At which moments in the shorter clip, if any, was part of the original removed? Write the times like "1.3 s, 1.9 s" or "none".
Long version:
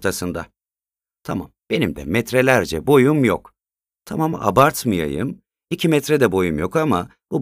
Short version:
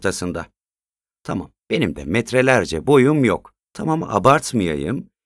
3.6 s